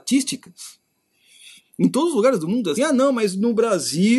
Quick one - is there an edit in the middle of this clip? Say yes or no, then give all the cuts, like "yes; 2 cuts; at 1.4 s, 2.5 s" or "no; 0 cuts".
yes; 1 cut; at 2.8 s